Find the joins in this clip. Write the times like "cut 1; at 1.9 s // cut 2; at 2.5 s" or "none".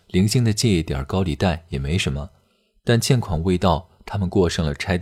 none